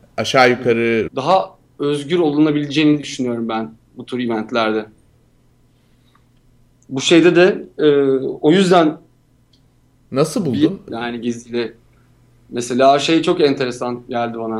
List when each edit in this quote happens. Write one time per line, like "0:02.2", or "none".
0:01.1
0:10.9